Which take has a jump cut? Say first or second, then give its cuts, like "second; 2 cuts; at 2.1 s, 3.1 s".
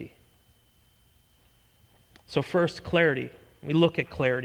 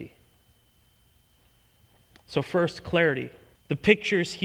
second; 1 cut; at 3.5 s